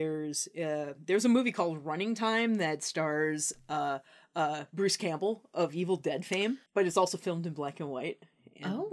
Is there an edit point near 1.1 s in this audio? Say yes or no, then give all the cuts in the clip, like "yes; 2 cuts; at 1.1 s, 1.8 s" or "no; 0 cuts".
no; 1 cut; at 6.7 s